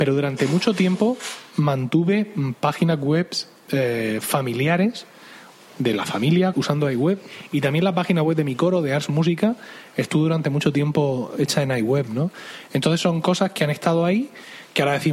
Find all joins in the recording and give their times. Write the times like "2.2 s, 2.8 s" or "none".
6.5 s